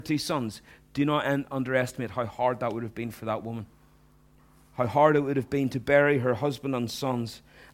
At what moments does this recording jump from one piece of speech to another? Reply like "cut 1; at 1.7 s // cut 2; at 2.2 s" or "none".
none